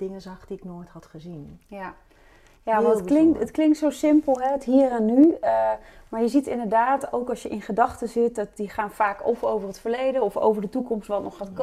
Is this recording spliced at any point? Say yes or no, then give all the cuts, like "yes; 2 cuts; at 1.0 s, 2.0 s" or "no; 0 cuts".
no; 0 cuts